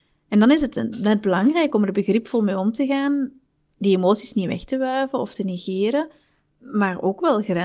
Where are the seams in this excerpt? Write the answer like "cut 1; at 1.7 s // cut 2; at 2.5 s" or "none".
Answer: cut 1; at 6.5 s